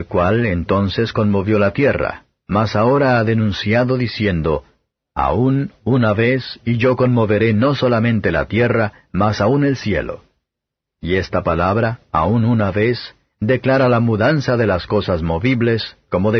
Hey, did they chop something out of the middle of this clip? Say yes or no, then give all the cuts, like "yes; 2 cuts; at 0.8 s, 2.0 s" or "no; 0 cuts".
no; 0 cuts